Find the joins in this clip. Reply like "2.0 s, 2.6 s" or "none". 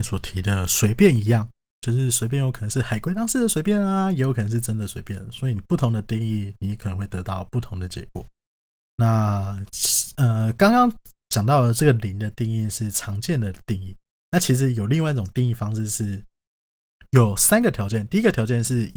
none

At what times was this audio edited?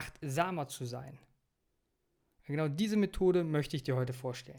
none

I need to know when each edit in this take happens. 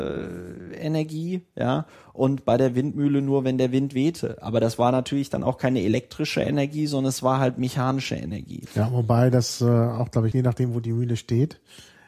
8.7 s, 10.3 s

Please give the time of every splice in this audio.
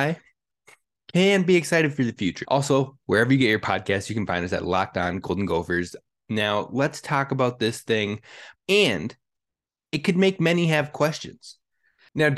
2.4 s, 8.5 s

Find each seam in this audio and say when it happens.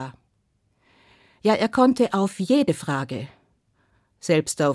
none

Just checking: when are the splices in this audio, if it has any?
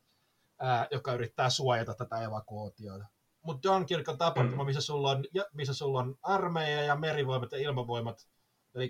3.3 s

